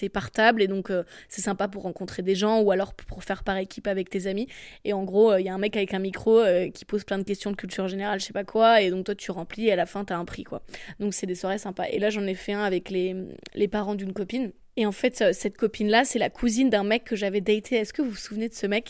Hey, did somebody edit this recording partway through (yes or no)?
no